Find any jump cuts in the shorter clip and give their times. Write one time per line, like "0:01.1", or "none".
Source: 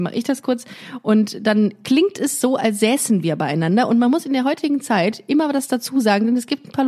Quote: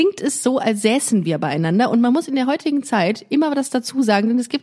none